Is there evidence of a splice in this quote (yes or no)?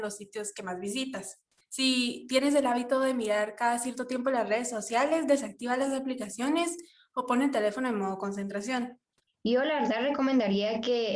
yes